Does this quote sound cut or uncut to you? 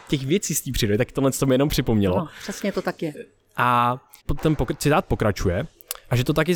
cut